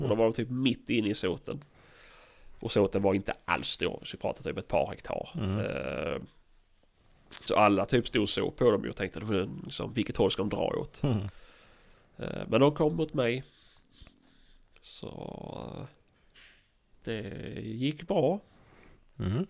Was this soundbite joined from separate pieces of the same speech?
no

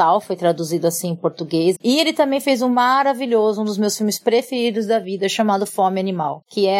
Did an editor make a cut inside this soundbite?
yes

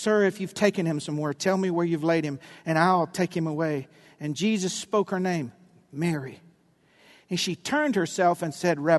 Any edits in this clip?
no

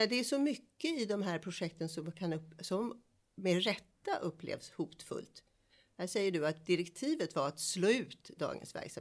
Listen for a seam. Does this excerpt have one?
no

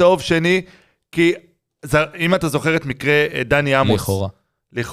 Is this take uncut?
yes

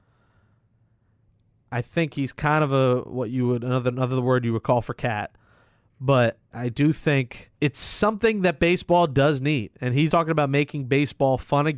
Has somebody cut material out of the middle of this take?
yes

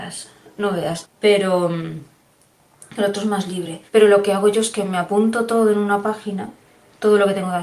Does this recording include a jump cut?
yes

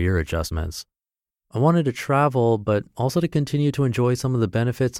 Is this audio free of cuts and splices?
no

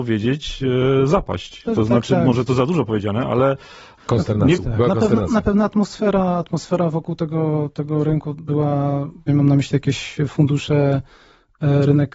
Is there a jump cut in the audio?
yes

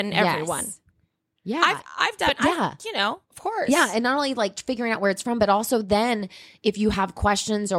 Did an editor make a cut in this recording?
yes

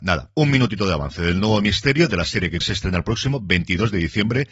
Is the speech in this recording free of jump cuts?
no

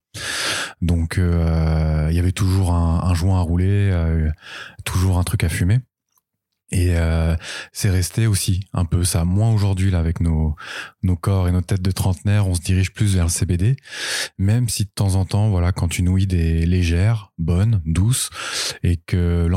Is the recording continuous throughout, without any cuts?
yes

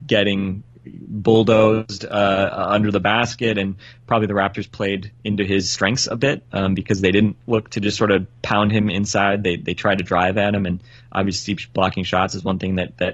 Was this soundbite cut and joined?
no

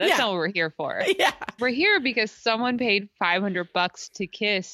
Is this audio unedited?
no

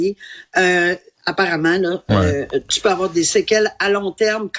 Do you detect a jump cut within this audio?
no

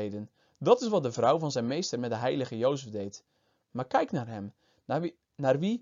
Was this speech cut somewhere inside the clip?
no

